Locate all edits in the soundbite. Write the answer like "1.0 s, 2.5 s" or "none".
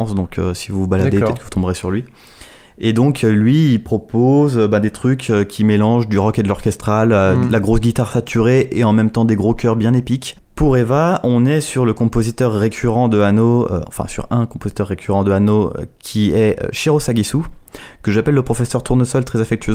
10.4 s